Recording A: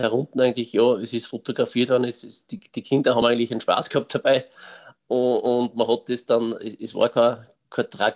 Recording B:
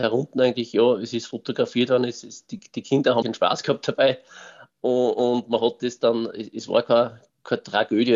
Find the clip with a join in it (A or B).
B